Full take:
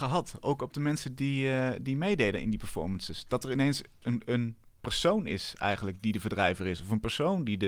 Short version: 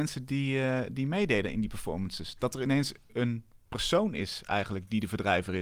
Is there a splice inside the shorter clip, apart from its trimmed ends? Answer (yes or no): yes